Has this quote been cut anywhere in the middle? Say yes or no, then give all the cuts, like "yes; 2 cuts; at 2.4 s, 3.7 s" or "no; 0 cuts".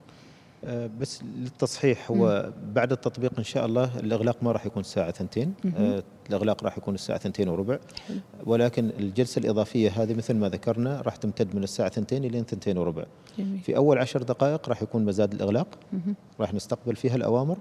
no; 0 cuts